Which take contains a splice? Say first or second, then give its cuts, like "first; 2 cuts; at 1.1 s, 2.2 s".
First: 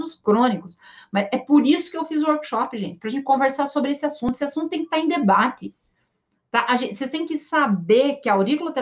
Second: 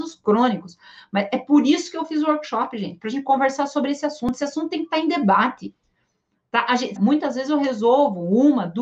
second; 1 cut; at 7.0 s